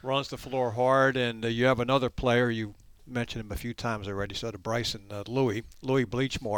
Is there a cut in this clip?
no; 0 cuts

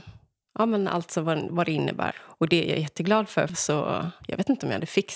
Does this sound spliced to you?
yes; 2 cuts; at 2.1 s, 3.5 s

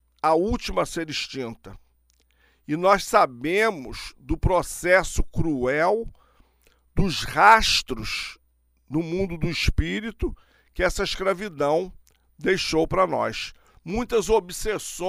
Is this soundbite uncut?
yes; 0 cuts

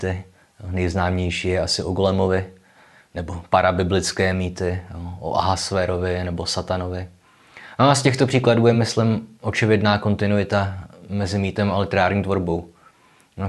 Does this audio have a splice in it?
no; 0 cuts

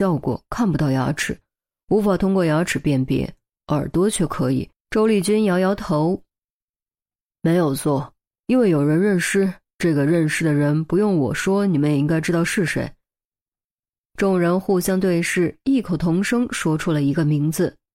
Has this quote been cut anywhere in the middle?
yes; 1 cut; at 4.7 s

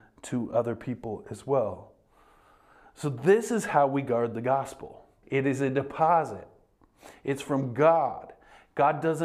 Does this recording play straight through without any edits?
no; 1 cut; at 5.2 s

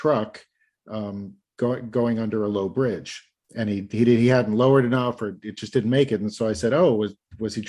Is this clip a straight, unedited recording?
yes; 0 cuts

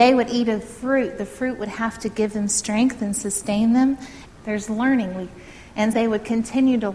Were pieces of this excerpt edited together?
yes; 2 cuts; at 4.3 s, 5.9 s

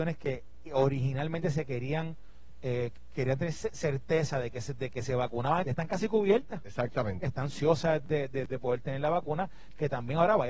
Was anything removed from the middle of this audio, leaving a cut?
yes; 2 cuts; at 5.6 s, 7.2 s

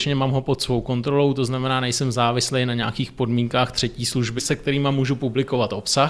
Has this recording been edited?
yes; 1 cut; at 4.4 s

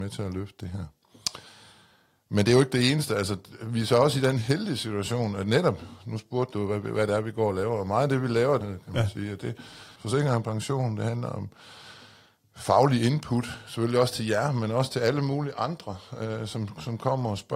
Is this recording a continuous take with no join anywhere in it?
no; 2 cuts; at 8.6 s, 9.9 s

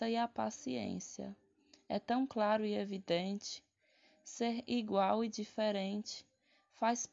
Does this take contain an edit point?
no; 0 cuts

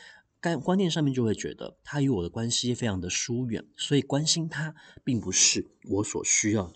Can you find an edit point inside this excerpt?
no; 0 cuts

